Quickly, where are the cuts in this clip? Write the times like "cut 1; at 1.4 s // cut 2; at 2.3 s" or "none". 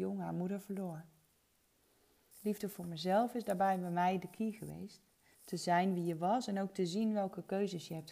cut 1; at 2.3 s // cut 2; at 5.3 s